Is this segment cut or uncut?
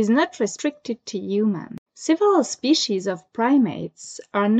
cut